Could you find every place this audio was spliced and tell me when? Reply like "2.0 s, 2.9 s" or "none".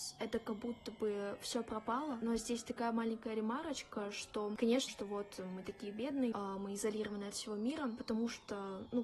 4.9 s, 6.3 s